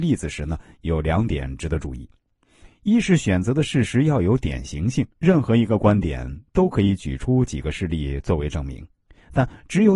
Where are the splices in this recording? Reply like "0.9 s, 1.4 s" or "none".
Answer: 5.1 s